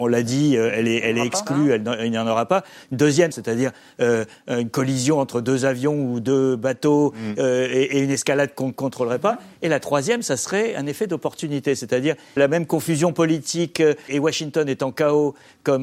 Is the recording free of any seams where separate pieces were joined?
no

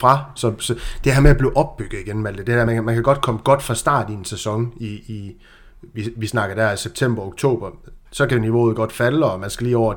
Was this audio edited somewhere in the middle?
no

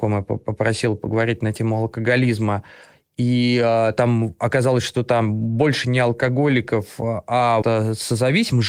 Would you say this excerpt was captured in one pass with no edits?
no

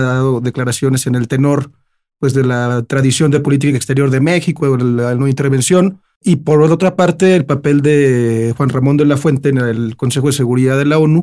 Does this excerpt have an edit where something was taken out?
no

